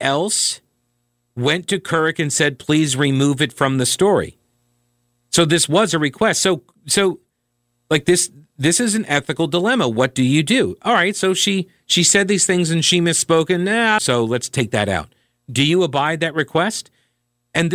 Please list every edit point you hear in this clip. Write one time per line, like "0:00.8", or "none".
0:14.0